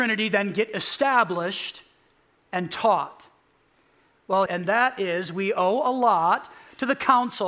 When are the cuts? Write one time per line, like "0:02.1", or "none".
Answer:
0:04.5